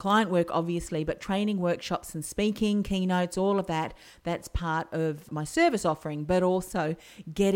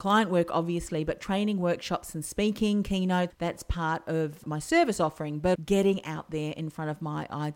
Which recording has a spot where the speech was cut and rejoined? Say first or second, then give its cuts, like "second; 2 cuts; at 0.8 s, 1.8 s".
second; 2 cuts; at 3.3 s, 5.5 s